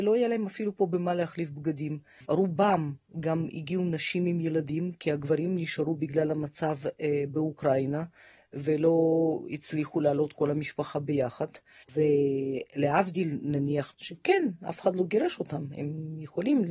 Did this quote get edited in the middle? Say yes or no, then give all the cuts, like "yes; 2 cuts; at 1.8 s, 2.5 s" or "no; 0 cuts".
yes; 3 cuts; at 2.2 s, 11.8 s, 13.9 s